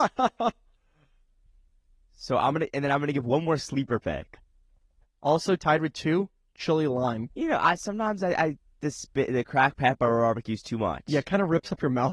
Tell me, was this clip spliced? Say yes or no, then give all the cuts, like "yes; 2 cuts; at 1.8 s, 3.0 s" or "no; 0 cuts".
yes; 2 cuts; at 5.0 s, 7.3 s